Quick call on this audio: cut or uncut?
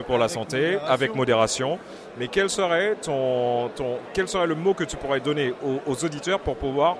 uncut